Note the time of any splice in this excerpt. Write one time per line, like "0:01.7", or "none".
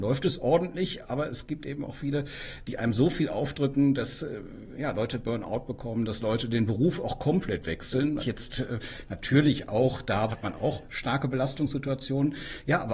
0:08.2
0:10.3